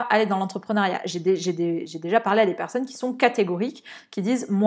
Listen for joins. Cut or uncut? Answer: uncut